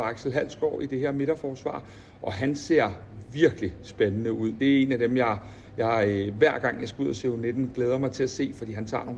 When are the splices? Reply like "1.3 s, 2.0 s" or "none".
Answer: none